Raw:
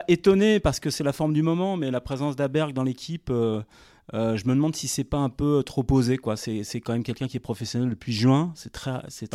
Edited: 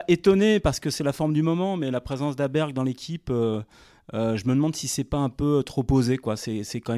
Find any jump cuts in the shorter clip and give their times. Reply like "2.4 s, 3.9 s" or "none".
none